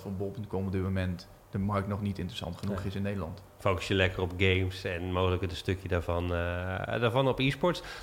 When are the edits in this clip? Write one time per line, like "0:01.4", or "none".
none